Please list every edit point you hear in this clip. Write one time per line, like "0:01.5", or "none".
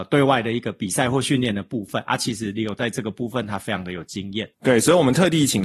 0:04.5